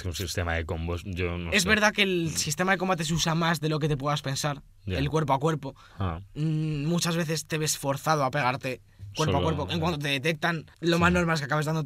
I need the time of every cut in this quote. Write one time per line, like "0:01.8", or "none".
0:10.7

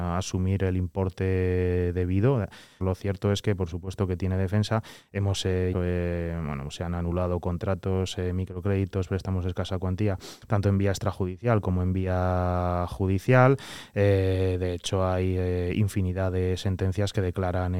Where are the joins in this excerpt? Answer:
0:02.8
0:05.7

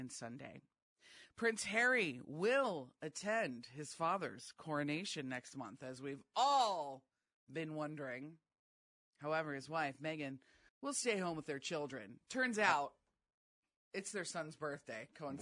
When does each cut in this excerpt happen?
0:10.7

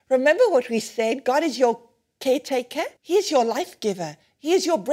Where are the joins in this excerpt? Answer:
0:03.0

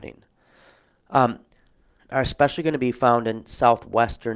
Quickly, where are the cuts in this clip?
0:02.0

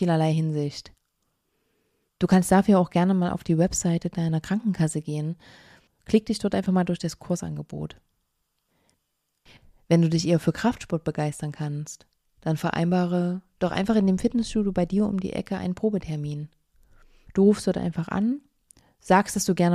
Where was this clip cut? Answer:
0:05.9
0:17.3

